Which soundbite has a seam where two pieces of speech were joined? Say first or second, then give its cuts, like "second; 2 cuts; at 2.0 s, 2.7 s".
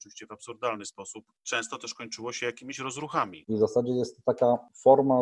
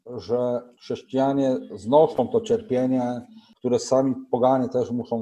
first; 1 cut; at 3.4 s